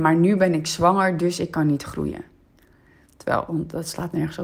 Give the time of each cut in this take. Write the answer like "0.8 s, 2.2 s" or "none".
3.5 s